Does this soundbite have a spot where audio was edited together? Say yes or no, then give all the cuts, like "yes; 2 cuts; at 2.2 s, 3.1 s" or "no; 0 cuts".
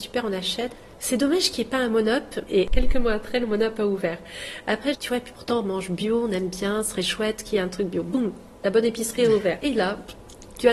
yes; 2 cuts; at 4.9 s, 9.6 s